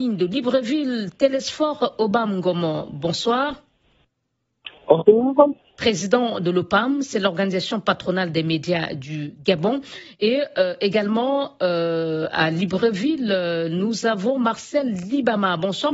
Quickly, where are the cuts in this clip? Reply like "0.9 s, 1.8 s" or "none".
none